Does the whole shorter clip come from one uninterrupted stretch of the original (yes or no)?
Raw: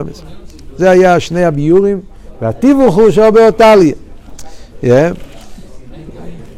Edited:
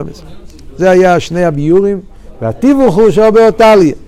yes